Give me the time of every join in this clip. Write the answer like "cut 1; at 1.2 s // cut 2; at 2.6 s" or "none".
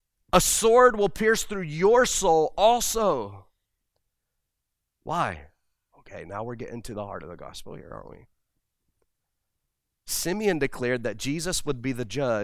cut 1; at 5.9 s